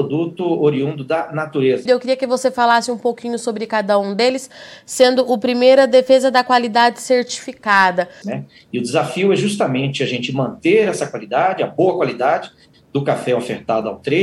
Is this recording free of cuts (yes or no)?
no